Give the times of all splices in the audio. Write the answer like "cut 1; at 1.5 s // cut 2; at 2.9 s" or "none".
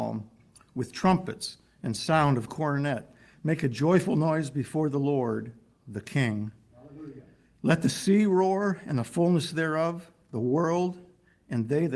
none